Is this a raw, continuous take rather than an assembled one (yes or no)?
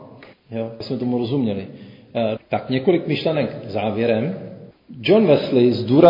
no